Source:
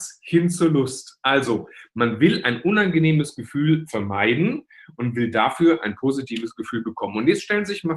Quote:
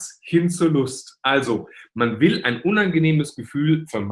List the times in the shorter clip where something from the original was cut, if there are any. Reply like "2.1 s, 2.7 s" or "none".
none